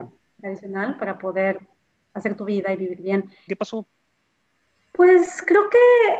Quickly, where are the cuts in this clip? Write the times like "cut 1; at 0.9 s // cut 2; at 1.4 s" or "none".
cut 1; at 3.5 s